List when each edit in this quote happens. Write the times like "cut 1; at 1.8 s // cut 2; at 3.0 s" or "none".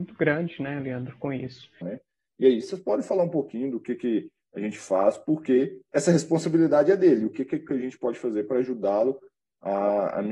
cut 1; at 1.8 s

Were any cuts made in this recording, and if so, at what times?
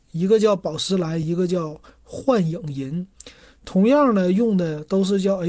none

